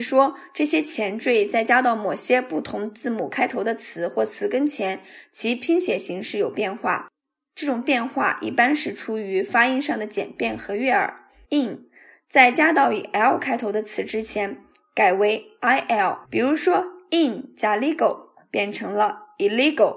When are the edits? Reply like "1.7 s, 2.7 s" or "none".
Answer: 11.4 s, 16.2 s